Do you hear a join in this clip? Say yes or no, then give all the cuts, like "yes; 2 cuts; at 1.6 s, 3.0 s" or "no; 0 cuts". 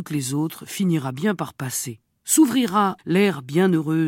yes; 1 cut; at 3.0 s